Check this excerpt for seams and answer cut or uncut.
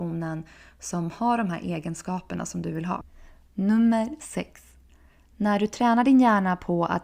cut